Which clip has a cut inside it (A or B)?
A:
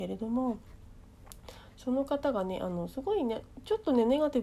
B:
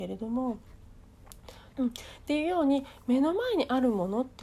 B